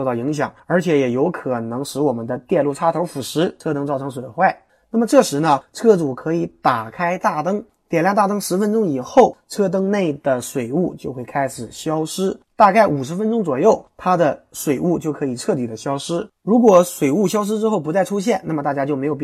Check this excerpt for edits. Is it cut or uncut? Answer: uncut